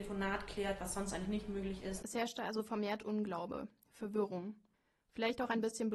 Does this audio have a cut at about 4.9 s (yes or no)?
no